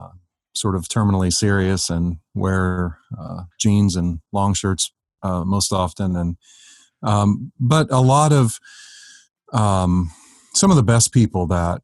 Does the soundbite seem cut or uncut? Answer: uncut